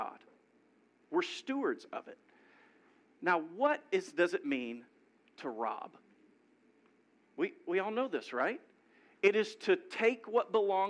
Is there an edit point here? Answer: yes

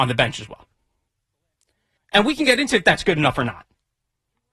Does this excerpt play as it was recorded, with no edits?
no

